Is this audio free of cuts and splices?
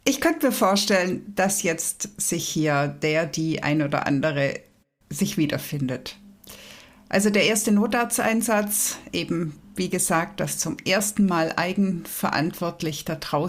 yes; 0 cuts

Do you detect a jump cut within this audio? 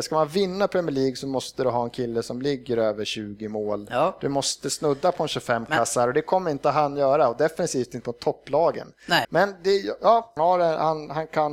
yes; 2 cuts; at 9.2 s, 10.4 s

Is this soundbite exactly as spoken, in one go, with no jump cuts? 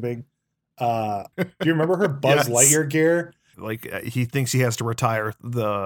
no; 2 cuts; at 1.3 s, 3.5 s

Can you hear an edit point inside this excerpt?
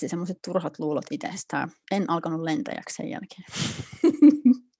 yes; 1 cut; at 1.8 s

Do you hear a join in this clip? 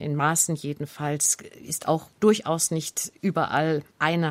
no; 0 cuts

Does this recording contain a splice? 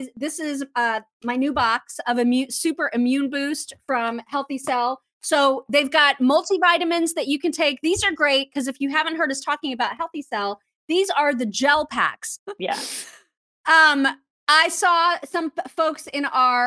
yes; 1 cut; at 12.4 s

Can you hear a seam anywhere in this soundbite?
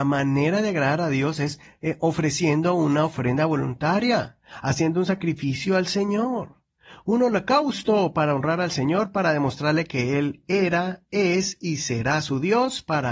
no; 0 cuts

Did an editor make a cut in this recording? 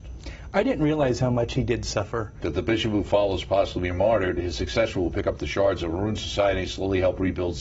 yes; 1 cut; at 2.4 s

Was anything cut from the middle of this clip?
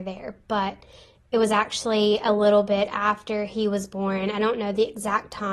no; 0 cuts

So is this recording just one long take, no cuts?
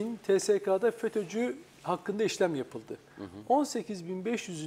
yes; 0 cuts

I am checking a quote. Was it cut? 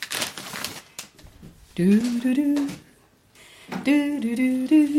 no; 0 cuts

